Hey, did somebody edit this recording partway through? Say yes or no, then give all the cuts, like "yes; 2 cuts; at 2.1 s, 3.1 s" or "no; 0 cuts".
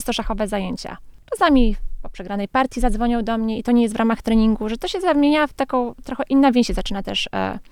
no; 0 cuts